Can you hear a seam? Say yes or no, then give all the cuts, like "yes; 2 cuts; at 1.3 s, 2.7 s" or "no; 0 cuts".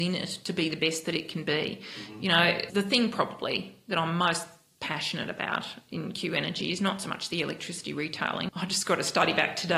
yes; 2 cuts; at 2.7 s, 8.5 s